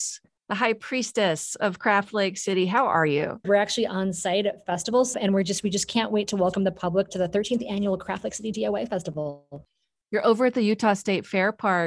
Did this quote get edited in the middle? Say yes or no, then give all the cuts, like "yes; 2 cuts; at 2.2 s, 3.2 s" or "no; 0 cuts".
yes; 2 cuts; at 3.4 s, 5.1 s